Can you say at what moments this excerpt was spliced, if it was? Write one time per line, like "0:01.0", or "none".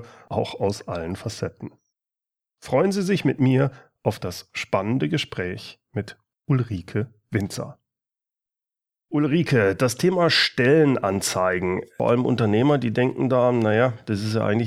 none